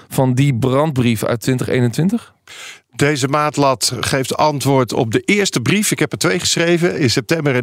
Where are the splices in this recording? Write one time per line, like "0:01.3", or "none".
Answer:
none